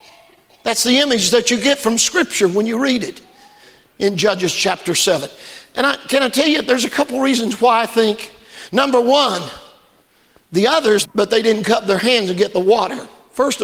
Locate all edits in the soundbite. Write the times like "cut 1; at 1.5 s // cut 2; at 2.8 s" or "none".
cut 1; at 11.0 s